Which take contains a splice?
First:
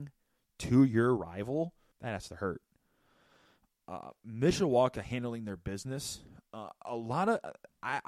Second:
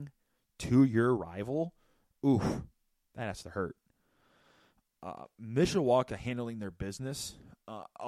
first; 1 cut; at 1.9 s

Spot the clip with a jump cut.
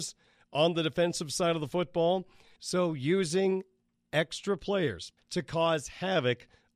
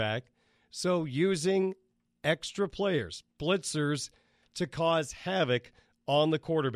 first; 2 cuts; at 2.6 s, 5.2 s

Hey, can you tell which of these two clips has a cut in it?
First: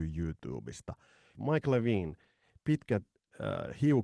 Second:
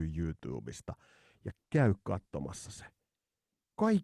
first; 1 cut; at 1.3 s

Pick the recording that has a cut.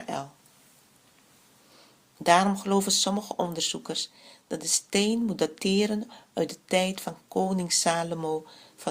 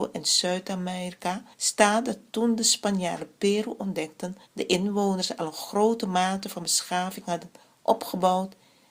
second; 2 cuts; at 1.5 s, 4.5 s

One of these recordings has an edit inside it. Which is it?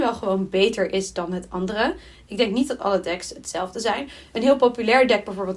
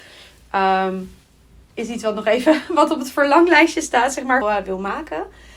second; 2 cuts; at 1.7 s, 4.4 s

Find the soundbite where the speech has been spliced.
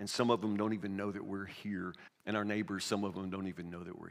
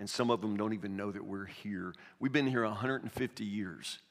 first; 1 cut; at 2.1 s

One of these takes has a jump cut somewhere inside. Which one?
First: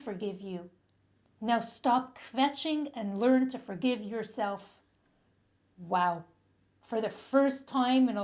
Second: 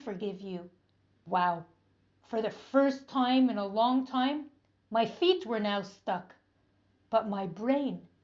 second; 1 cut; at 1.3 s

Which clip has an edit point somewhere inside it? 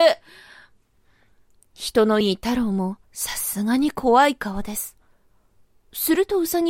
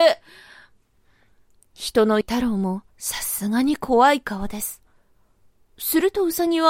second; 1 cut; at 2.2 s

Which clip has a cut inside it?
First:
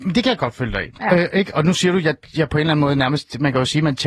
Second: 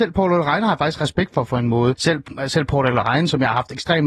second; 1 cut; at 2.0 s

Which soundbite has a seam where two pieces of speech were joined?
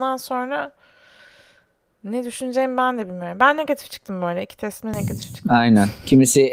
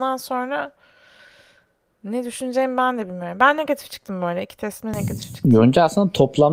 first; 1 cut; at 5.4 s

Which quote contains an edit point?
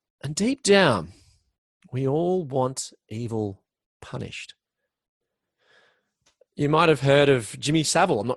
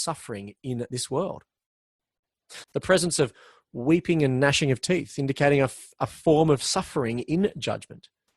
second; 1 cut; at 2.6 s

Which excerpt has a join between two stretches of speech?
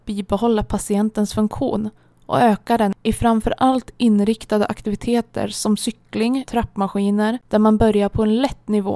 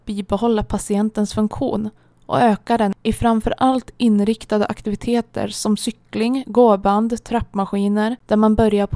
first; 1 cut; at 6.5 s

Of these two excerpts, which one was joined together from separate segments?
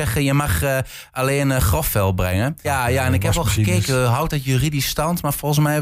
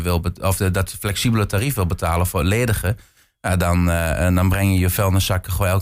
first; 1 cut; at 2.6 s

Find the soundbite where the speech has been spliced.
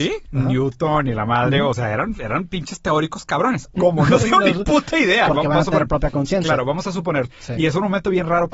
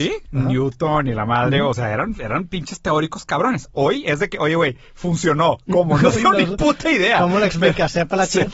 first; 3 cuts; at 3.7 s, 5.3 s, 7.3 s

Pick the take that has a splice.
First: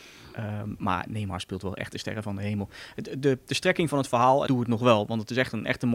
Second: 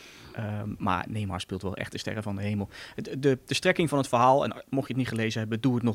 first; 1 cut; at 4.5 s

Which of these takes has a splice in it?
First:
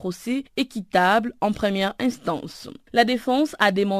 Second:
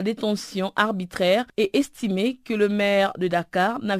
first; 1 cut; at 2.8 s

